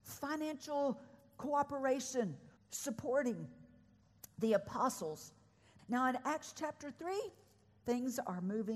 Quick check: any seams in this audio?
yes; 2 cuts; at 2.6 s, 5.8 s

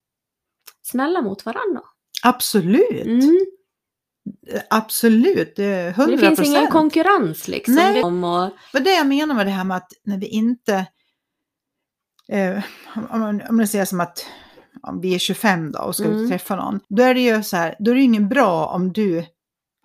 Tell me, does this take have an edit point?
yes; 2 cuts; at 8.0 s, 16.8 s

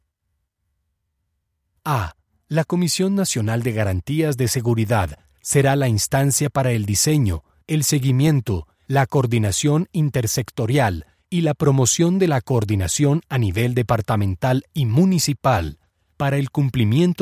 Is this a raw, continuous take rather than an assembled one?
yes; 0 cuts

